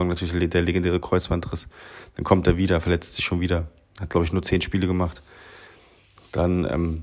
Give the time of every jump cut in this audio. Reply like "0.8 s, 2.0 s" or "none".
none